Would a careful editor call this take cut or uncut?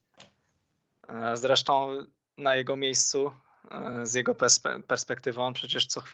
uncut